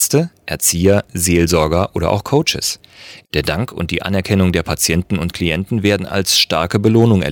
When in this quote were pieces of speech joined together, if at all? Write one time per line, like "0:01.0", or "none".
0:03.2